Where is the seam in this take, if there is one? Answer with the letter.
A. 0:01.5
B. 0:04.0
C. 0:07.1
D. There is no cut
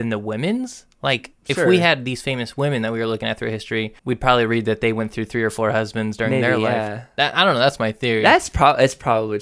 B